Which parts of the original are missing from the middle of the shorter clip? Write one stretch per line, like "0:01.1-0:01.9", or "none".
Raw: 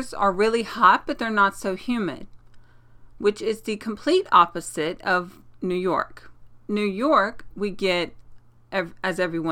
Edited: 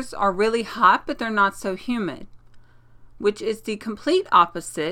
none